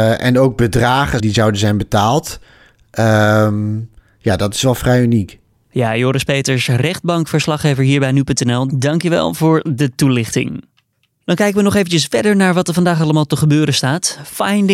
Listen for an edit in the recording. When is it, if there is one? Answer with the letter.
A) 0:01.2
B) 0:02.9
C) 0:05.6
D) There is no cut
A